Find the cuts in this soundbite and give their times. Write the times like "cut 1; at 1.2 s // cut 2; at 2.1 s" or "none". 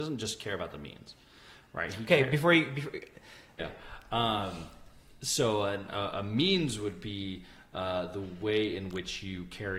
cut 1; at 3.6 s